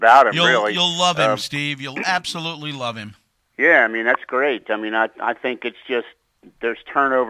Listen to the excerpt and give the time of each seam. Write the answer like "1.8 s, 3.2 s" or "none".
none